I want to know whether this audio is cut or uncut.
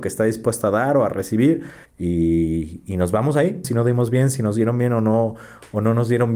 cut